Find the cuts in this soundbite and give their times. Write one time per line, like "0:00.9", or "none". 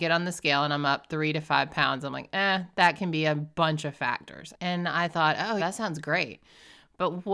0:04.5
0:05.6